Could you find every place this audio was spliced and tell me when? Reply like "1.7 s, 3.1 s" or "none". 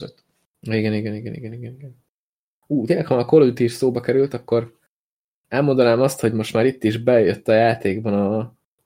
none